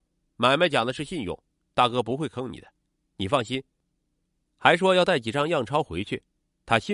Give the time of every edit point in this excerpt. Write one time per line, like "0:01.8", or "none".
none

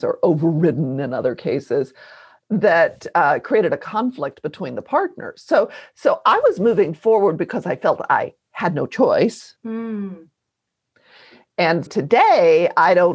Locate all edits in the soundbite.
0:09.6
0:11.9

